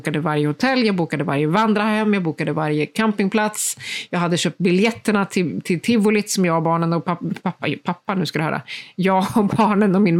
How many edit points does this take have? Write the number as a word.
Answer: zero